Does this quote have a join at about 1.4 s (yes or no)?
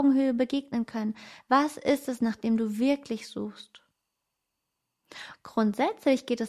yes